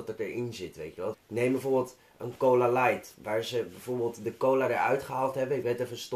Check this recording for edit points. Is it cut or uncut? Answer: cut